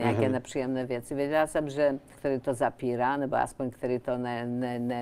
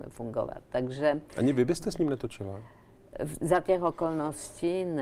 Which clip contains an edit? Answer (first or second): first